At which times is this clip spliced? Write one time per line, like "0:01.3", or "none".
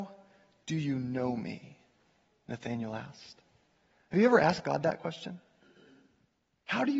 none